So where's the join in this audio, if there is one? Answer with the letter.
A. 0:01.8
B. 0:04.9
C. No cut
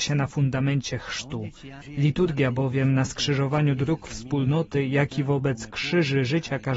A